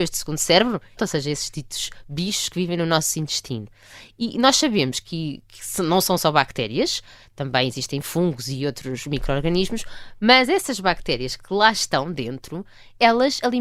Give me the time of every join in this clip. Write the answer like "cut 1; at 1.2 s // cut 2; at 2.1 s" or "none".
cut 1; at 1.0 s